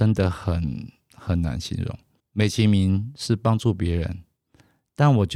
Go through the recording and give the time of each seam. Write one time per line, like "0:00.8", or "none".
0:02.2